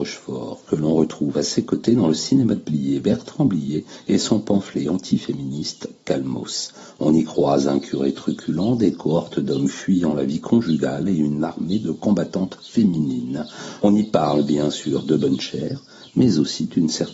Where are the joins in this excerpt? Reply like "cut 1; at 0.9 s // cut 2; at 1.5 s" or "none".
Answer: none